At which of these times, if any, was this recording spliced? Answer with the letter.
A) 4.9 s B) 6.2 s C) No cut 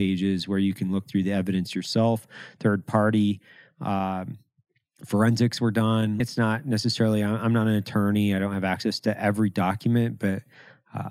B